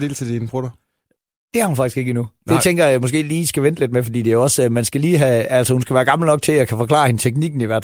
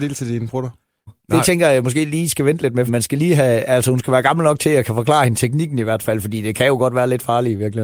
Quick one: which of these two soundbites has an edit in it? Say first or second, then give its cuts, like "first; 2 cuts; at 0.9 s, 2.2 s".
second; 2 cuts; at 1.1 s, 2.9 s